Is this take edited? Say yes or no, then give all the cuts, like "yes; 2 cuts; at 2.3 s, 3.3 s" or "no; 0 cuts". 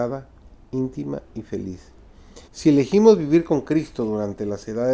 yes; 1 cut; at 2.5 s